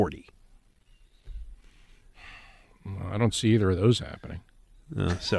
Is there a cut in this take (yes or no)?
no